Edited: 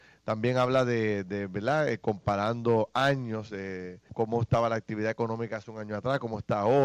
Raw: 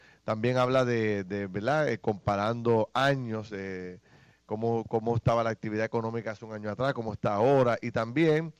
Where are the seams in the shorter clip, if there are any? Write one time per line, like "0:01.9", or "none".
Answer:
0:04.1